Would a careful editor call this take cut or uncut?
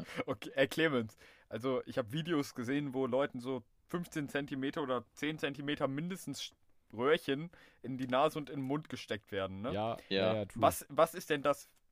uncut